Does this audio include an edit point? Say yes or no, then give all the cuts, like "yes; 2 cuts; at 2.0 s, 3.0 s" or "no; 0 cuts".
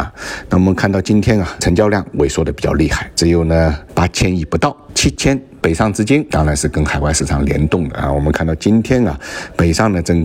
yes; 1 cut; at 5.6 s